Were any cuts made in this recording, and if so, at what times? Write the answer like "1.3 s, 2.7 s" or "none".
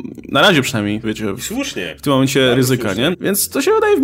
1.0 s, 3.1 s